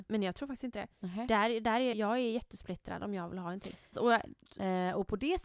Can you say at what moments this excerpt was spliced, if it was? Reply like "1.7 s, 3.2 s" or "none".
1.9 s, 3.9 s